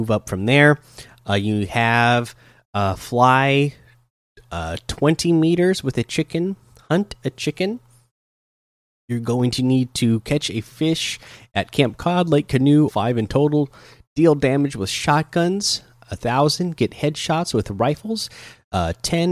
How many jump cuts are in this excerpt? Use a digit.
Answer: 1